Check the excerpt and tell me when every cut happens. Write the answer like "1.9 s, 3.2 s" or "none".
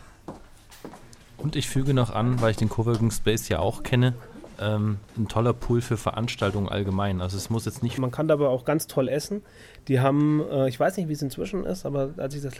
5.1 s, 8.0 s